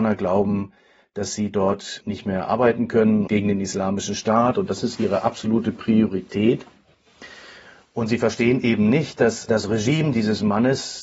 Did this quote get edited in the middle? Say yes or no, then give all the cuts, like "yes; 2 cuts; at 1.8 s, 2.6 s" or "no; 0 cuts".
no; 0 cuts